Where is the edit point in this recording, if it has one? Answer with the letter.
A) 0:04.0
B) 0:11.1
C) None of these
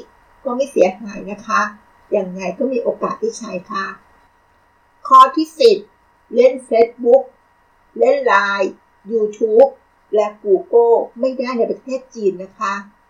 B